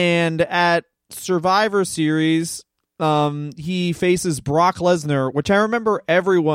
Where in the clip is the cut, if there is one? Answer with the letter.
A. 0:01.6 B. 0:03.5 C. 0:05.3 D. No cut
D